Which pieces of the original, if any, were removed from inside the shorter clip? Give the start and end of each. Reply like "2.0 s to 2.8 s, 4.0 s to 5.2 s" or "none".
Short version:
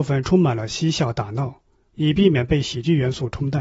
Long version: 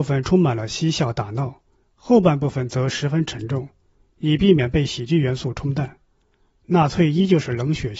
1.9 s to 4.1 s